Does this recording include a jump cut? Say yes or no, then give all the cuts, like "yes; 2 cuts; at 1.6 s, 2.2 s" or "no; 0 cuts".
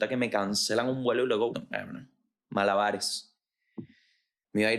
yes; 1 cut; at 1.5 s